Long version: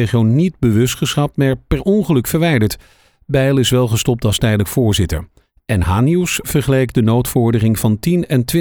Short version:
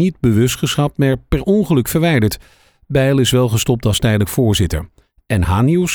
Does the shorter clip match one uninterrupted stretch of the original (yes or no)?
yes